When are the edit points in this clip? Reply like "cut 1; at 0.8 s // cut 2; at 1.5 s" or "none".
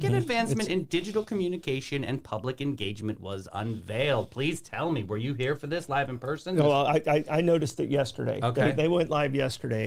none

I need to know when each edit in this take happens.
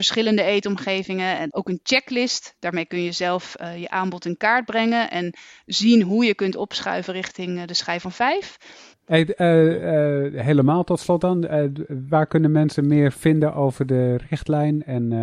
cut 1; at 1.5 s // cut 2; at 8.9 s

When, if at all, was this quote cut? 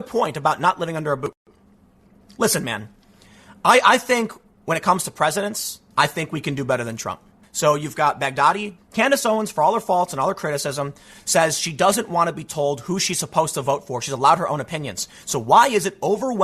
cut 1; at 5.9 s // cut 2; at 7.4 s // cut 3; at 8.8 s

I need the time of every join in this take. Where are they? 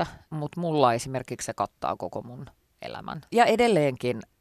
cut 1; at 3.3 s

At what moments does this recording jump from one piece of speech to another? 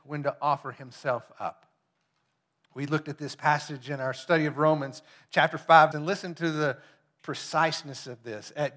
cut 1; at 5.9 s

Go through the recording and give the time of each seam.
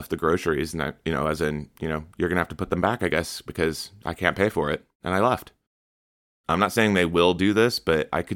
cut 1; at 6.4 s

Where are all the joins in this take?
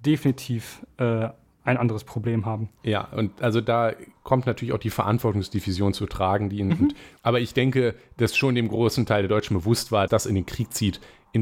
cut 1; at 7.2 s // cut 2; at 10.1 s

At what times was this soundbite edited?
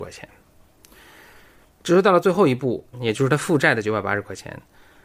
cut 1; at 1.6 s // cut 2; at 2.9 s

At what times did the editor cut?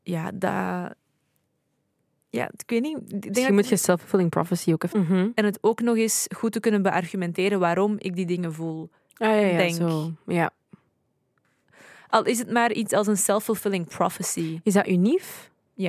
cut 1; at 4.9 s

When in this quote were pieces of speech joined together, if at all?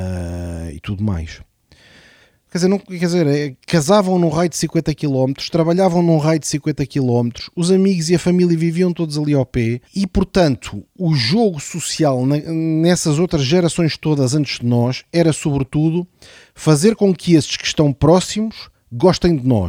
cut 1; at 2.3 s // cut 2; at 9.8 s

